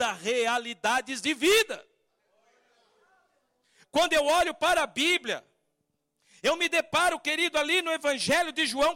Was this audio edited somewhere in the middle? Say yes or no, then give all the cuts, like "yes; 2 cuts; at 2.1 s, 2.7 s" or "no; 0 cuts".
no; 0 cuts